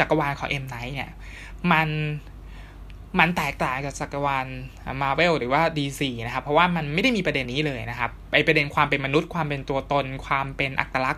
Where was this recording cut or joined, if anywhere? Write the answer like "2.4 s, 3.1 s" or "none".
7.5 s